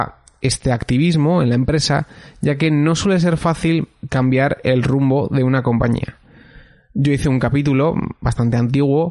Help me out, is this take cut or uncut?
uncut